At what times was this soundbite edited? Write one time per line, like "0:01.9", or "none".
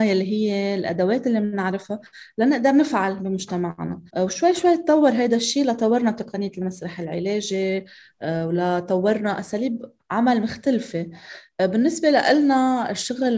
0:04.1